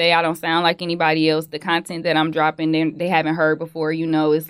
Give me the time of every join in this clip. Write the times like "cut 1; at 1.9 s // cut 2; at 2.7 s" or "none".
none